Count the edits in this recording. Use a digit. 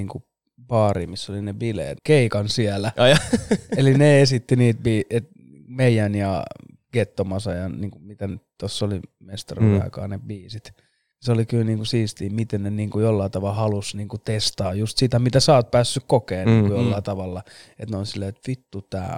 1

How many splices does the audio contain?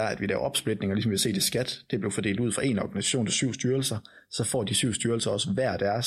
0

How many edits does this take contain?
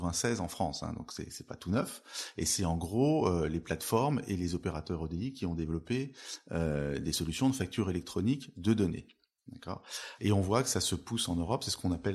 1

